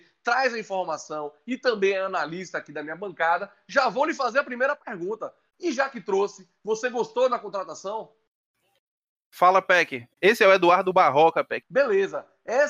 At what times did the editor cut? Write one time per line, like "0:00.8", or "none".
0:05.5
0:10.1
0:11.6